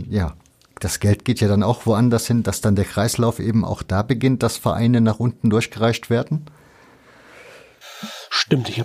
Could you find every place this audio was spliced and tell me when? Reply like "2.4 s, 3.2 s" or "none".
none